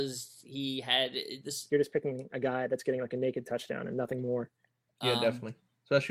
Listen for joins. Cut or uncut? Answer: cut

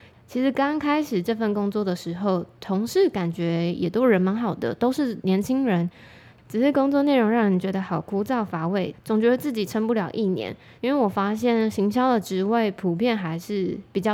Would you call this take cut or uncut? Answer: cut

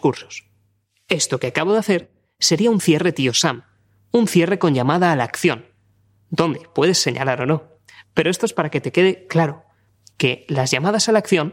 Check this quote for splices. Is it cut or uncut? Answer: uncut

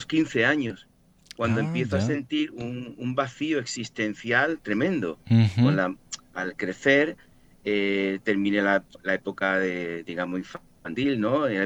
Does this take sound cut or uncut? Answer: uncut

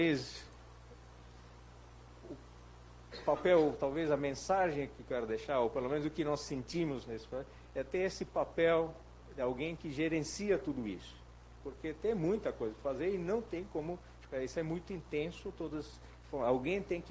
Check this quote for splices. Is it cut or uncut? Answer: cut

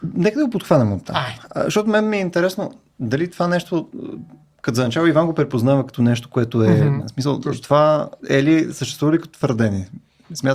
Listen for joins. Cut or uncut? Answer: cut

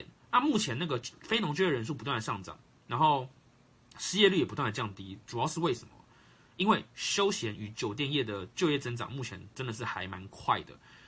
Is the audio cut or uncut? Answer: uncut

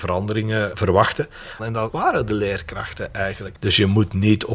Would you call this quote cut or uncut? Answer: cut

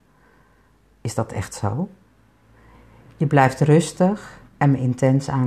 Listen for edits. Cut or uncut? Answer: cut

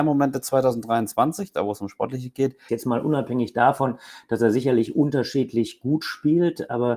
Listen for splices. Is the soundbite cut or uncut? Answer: cut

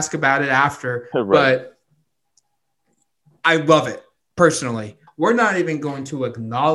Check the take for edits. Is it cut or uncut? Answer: cut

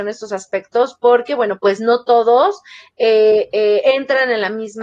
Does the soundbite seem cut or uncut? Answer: uncut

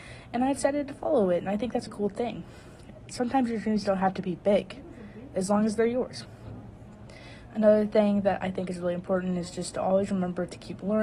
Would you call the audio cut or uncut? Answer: cut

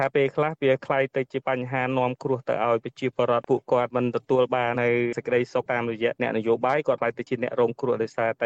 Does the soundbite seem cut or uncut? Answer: cut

